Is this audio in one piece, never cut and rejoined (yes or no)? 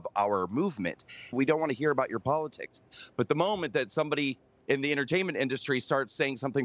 no